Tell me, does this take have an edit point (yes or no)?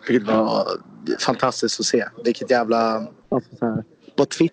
yes